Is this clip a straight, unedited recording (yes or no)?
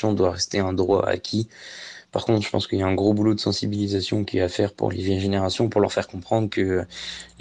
yes